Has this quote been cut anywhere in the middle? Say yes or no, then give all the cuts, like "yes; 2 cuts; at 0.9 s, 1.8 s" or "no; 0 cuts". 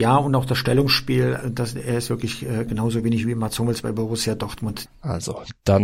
yes; 3 cuts; at 1.4 s, 2.7 s, 4.9 s